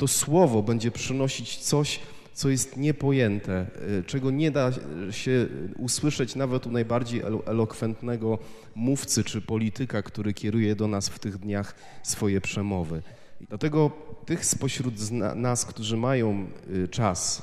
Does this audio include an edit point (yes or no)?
yes